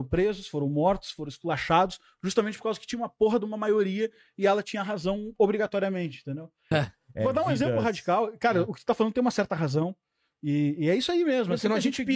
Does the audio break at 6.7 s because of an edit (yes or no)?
yes